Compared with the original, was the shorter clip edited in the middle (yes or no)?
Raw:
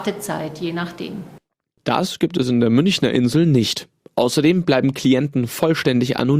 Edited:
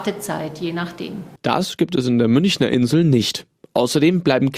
yes